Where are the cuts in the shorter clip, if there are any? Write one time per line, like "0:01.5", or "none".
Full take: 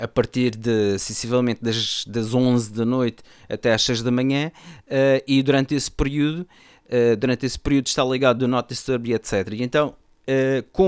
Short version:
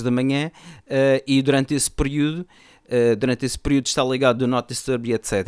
none